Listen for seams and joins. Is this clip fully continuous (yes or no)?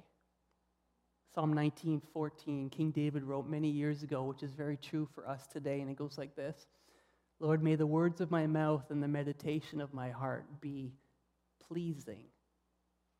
yes